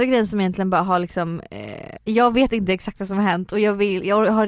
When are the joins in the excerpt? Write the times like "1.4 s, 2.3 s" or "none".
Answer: 2.0 s